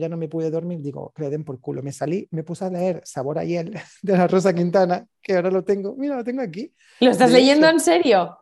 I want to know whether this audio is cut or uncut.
uncut